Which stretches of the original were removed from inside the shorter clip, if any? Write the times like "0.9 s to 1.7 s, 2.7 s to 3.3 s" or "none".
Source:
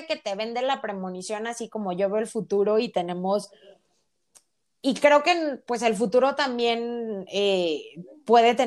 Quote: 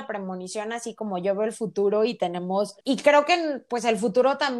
3.5 s to 4.8 s